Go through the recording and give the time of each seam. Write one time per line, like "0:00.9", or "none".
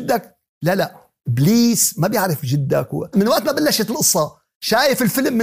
0:03.1